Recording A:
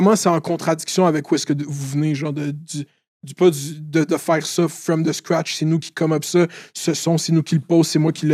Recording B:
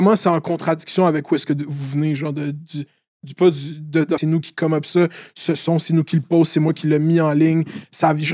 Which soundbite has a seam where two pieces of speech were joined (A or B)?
B